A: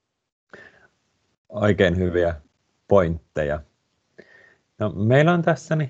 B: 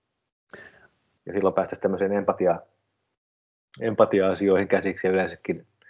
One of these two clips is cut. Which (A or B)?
B